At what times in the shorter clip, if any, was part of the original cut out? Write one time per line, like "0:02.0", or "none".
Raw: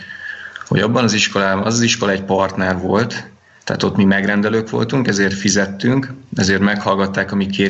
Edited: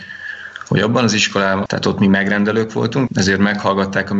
0:01.7
0:03.1